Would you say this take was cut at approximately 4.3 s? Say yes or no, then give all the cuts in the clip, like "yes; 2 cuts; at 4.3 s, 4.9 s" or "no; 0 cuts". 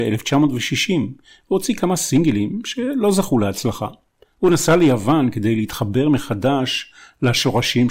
yes; 1 cut; at 4.3 s